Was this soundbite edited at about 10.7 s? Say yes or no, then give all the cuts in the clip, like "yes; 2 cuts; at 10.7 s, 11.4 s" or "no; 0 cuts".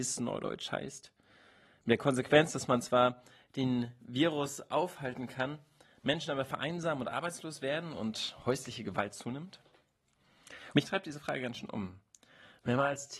yes; 1 cut; at 10.7 s